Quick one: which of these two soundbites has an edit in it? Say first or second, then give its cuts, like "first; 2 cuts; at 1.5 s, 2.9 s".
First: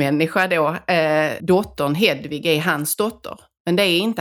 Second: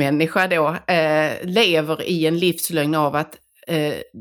first; 1 cut; at 1.4 s